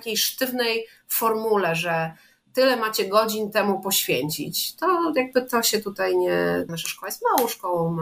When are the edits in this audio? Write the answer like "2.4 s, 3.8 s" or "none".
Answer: 6.7 s